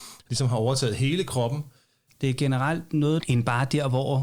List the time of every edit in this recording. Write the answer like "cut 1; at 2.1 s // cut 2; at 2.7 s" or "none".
cut 1; at 2.1 s // cut 2; at 3.2 s